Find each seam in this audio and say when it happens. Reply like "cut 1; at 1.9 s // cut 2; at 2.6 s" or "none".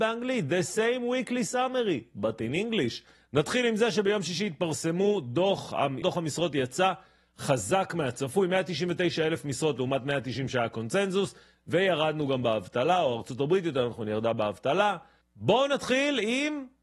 cut 1; at 3.1 s // cut 2; at 6.0 s // cut 3; at 15.2 s